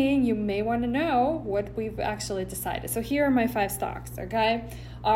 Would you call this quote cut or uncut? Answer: uncut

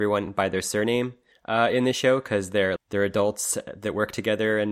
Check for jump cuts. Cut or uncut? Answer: cut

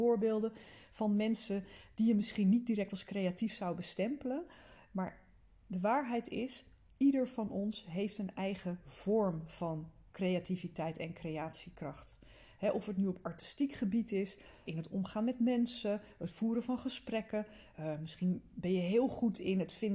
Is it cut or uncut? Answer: cut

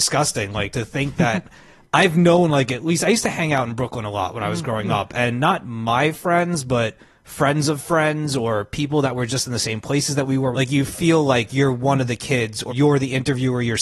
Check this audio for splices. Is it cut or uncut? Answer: cut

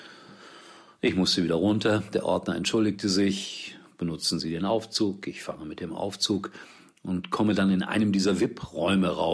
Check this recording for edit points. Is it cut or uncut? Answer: uncut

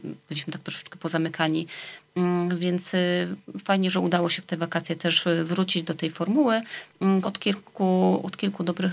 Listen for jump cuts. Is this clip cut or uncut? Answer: cut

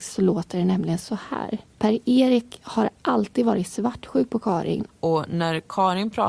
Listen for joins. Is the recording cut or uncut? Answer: cut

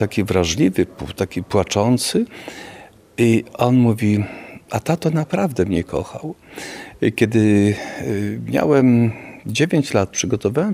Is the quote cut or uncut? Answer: uncut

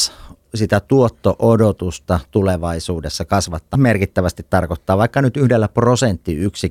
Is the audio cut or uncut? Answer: cut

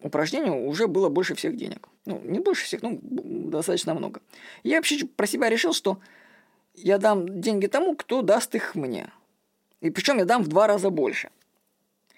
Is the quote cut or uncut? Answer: cut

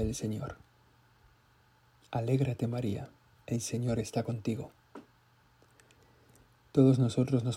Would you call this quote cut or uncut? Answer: uncut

